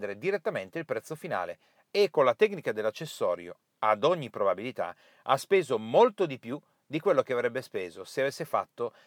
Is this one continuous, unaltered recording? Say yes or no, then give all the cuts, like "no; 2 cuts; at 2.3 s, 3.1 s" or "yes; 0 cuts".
yes; 0 cuts